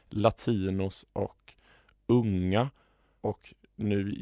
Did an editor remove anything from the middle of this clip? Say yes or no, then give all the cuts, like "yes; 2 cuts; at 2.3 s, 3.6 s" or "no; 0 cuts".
yes; 1 cut; at 3.2 s